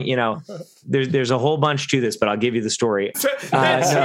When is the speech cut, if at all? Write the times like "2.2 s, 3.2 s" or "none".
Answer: 3.1 s